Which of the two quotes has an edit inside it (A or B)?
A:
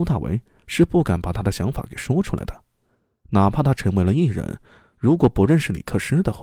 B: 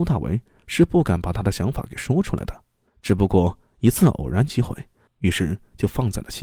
B